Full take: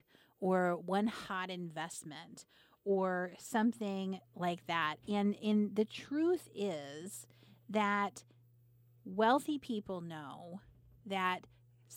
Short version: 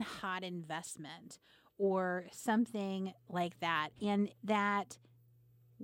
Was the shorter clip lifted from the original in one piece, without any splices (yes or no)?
no